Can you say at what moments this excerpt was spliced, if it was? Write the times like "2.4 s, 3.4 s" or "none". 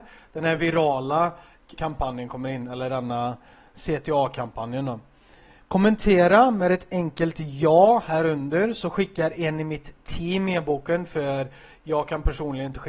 1.8 s